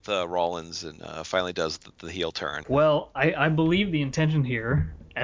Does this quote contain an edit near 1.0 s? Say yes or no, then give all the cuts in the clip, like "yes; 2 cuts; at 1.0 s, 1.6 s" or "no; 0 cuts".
no; 1 cut; at 2.6 s